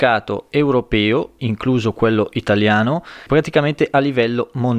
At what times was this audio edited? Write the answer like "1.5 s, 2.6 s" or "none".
1.4 s, 3.3 s